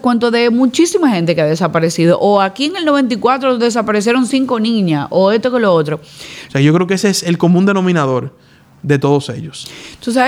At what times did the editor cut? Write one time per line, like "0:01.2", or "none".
0:06.5